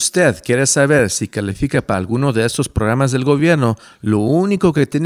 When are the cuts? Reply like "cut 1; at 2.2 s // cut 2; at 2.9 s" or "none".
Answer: none